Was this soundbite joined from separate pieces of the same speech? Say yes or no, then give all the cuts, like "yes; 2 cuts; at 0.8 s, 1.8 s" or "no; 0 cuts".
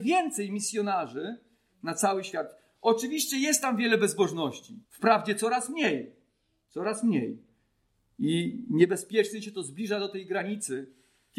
yes; 1 cut; at 4.8 s